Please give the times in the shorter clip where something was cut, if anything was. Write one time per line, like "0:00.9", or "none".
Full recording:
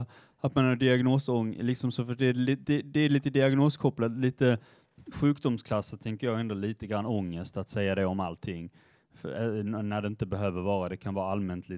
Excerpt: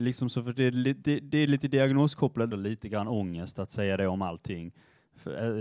0:02.5